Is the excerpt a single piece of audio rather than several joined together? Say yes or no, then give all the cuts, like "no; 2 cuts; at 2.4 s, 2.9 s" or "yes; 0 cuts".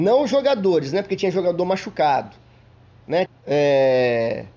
no; 1 cut; at 3.3 s